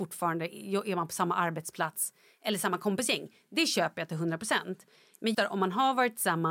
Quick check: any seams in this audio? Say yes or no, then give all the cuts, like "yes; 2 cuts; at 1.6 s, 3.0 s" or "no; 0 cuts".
yes; 1 cut; at 5.3 s